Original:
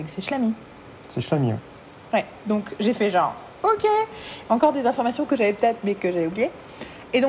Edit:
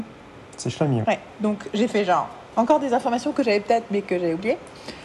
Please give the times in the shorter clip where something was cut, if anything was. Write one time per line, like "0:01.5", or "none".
0:01.0
0:02.5